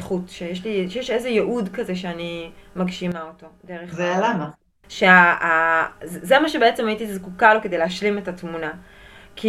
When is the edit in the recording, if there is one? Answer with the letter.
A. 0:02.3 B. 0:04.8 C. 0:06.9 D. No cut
B